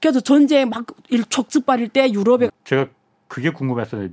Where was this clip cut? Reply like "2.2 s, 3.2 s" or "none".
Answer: 2.5 s